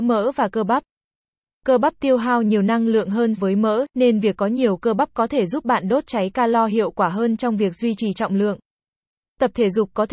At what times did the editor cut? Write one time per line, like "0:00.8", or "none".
0:03.4